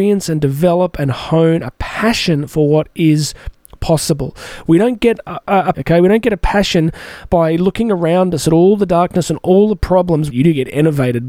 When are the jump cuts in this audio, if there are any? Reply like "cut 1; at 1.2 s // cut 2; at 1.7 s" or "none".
cut 1; at 5.7 s // cut 2; at 10.3 s